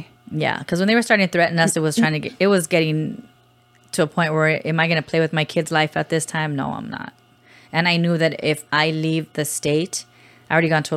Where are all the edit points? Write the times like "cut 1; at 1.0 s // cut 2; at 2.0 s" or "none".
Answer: none